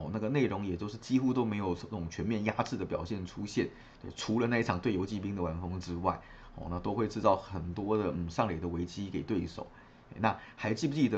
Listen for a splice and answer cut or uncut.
uncut